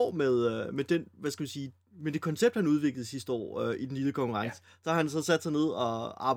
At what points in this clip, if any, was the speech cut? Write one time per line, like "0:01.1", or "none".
none